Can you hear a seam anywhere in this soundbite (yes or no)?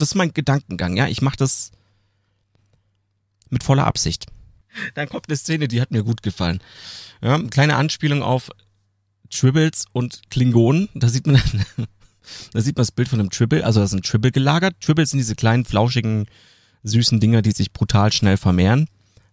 no